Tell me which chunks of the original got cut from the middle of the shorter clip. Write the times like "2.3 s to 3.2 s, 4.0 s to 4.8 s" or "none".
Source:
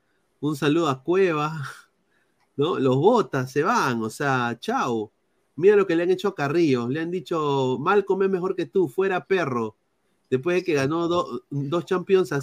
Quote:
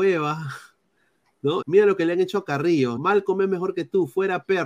2.8 s to 5.5 s, 6.9 s to 7.8 s